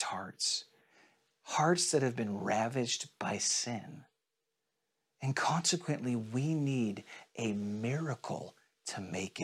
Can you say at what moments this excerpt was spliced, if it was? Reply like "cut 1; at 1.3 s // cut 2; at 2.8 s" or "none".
none